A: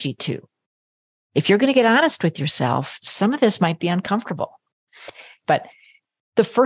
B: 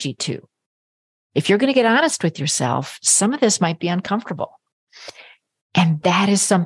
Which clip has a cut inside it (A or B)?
A